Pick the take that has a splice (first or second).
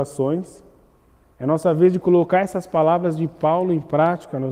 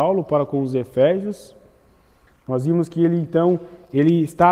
first